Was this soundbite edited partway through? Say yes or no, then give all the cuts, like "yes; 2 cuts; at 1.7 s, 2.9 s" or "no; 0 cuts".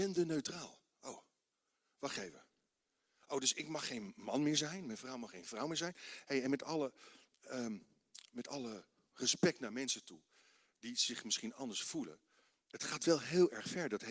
no; 0 cuts